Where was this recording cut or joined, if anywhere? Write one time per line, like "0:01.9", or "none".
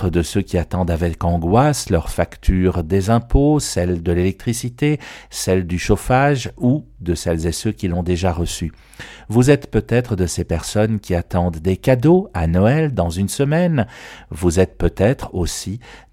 none